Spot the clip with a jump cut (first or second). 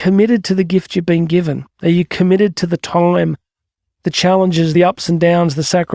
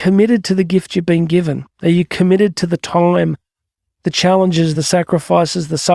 second